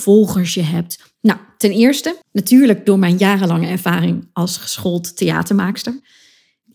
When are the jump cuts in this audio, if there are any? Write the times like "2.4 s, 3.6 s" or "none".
1.2 s, 2.2 s